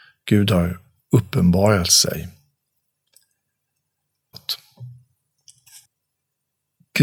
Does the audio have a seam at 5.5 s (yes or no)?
no